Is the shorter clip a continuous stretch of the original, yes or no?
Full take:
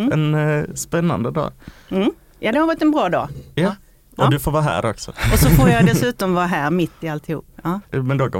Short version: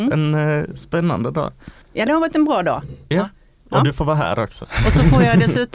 no